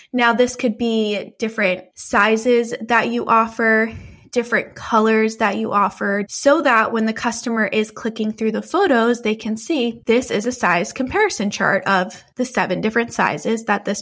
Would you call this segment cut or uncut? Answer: cut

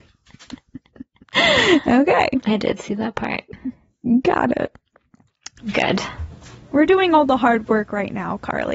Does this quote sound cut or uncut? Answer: cut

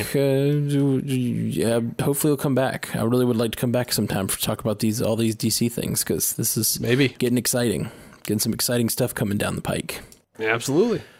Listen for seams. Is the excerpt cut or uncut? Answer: uncut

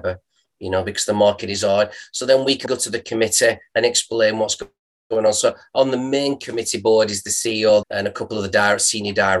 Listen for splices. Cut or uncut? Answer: cut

